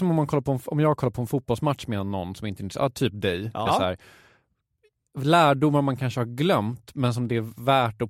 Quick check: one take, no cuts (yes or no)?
no